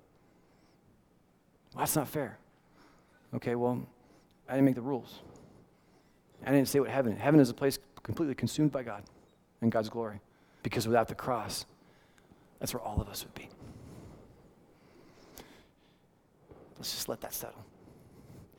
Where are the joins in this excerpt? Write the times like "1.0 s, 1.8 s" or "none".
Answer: 10.6 s